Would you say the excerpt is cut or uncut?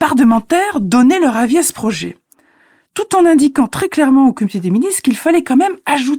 uncut